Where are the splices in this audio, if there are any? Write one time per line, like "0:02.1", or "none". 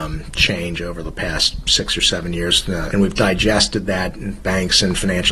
0:02.9